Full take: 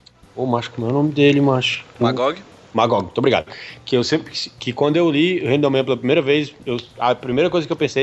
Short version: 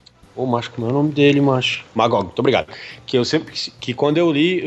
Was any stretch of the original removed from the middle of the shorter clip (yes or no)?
yes